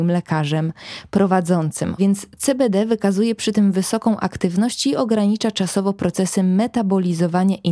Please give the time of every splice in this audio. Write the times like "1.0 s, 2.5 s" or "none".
2.0 s